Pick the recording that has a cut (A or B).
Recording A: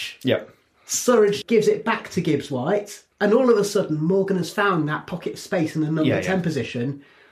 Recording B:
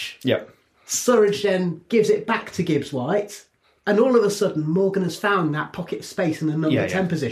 A